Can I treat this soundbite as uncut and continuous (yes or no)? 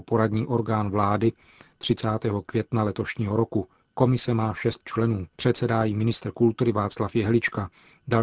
no